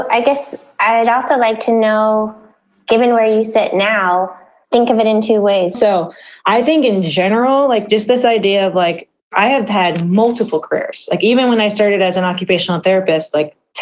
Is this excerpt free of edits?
no; 1 cut; at 5.7 s

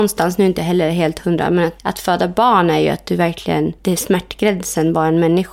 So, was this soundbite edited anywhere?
yes; 2 cuts; at 1.8 s, 3.8 s

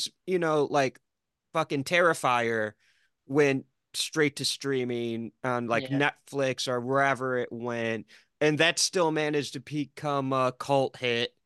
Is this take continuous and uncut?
yes; 0 cuts

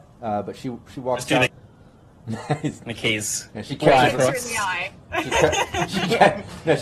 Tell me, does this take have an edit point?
yes; 1 cut; at 1.5 s

